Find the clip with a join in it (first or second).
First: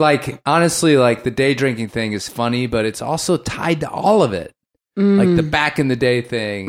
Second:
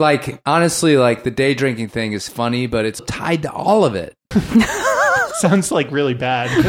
second